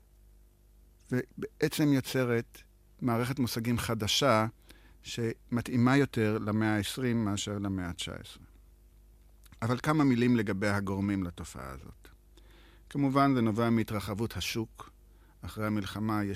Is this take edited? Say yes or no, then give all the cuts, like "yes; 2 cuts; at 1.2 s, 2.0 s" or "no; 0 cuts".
no; 0 cuts